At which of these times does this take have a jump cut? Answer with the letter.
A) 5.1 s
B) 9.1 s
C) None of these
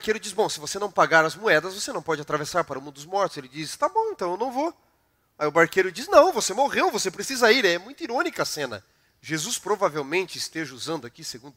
B